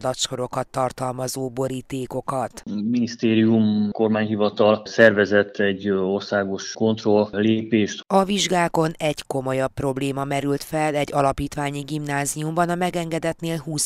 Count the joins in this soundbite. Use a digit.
2